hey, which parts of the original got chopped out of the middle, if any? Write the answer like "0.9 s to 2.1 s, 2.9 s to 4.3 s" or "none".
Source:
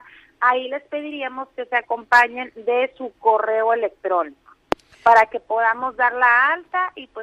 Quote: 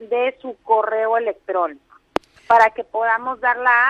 none